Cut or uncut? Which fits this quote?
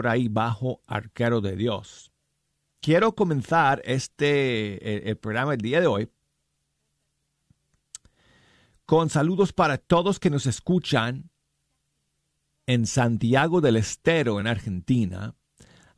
uncut